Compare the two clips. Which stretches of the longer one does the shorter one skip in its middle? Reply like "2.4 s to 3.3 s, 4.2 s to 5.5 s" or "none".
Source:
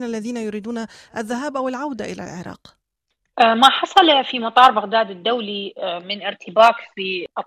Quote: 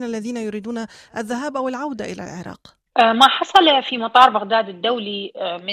2.9 s to 3.3 s